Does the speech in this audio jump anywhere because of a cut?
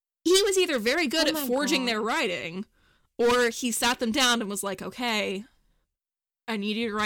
no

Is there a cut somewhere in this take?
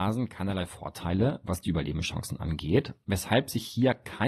no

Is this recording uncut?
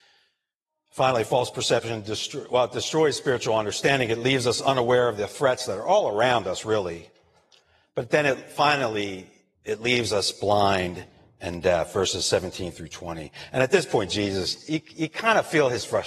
yes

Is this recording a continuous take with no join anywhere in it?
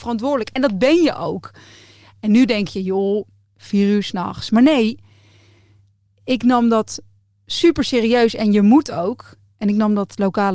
yes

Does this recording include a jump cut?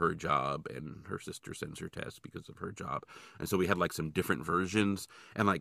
no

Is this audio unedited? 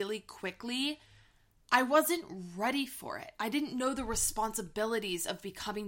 yes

